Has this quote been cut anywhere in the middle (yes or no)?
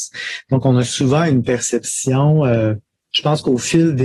yes